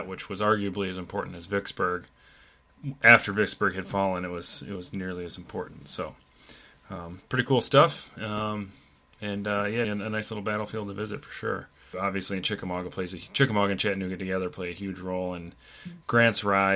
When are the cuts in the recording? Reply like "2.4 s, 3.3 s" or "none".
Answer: 9.8 s, 11.9 s

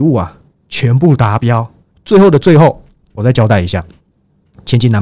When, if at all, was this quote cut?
1.9 s

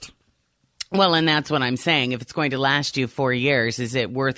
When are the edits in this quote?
none

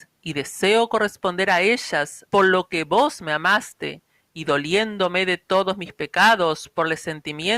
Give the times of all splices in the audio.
2.3 s

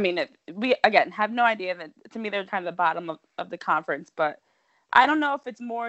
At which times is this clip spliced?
2.5 s

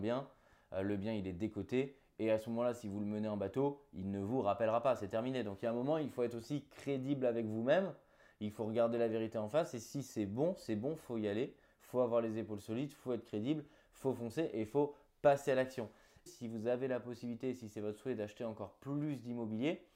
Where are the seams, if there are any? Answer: 16.3 s

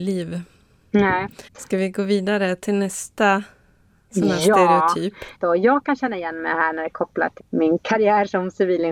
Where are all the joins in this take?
1.5 s, 5.4 s, 7.4 s

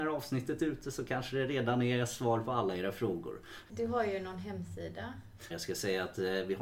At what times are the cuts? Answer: 3.7 s, 5.5 s

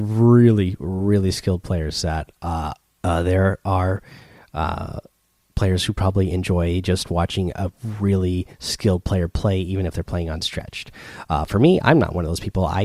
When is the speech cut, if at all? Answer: 3.0 s

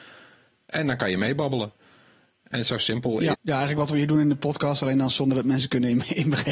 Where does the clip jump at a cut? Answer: 3.3 s

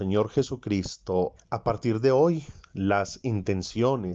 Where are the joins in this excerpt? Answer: 1.4 s

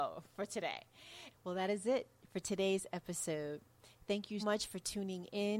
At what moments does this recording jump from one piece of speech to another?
1.3 s, 4.4 s

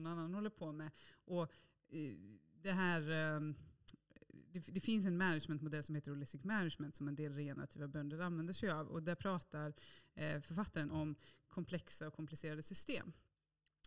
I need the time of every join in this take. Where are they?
10.9 s

